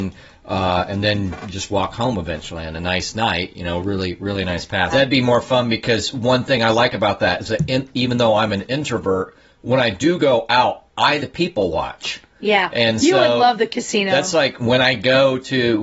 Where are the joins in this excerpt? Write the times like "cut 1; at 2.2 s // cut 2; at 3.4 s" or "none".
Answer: cut 1; at 4.9 s // cut 2; at 11.2 s // cut 3; at 14.6 s

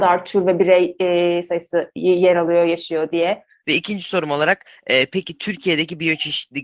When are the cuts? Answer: cut 1; at 3.6 s

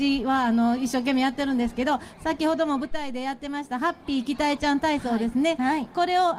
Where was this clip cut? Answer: none

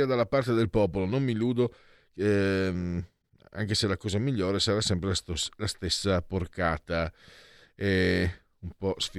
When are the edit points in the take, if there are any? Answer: none

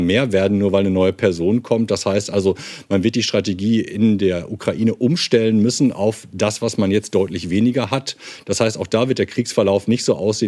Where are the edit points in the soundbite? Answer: none

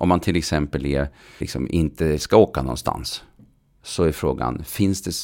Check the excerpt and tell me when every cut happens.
cut 1; at 1.4 s

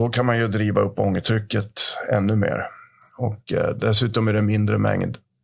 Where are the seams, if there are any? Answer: none

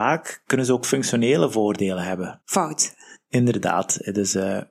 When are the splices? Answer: cut 1; at 2.4 s

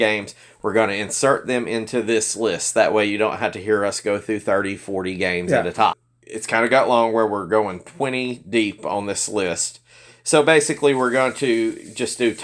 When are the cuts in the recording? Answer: cut 1; at 5.9 s

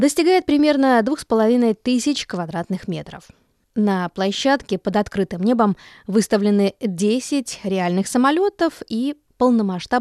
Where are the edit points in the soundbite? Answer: none

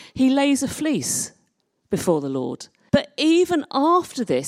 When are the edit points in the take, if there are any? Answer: cut 1; at 2.9 s

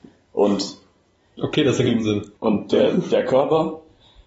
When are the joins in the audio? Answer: cut 1; at 2.3 s

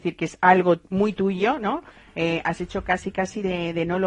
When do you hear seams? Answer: none

